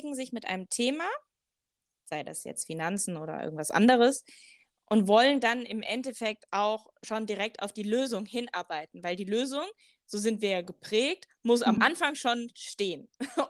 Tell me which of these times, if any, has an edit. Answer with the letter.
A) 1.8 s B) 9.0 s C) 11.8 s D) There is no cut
D